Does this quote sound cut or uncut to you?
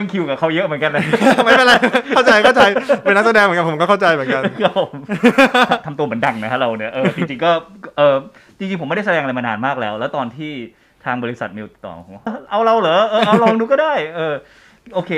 cut